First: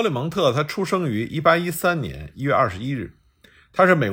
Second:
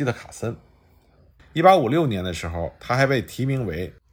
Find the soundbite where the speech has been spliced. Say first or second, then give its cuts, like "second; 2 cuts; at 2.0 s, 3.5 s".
second; 1 cut; at 1.4 s